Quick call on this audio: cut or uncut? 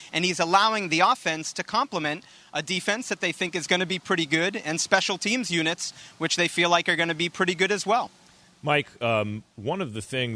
uncut